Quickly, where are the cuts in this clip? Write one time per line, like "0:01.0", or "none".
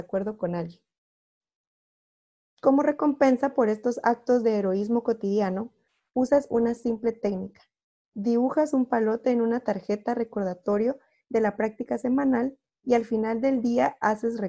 none